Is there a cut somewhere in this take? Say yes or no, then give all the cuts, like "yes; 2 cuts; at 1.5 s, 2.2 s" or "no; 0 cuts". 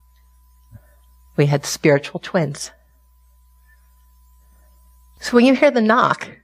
yes; 1 cut; at 1.2 s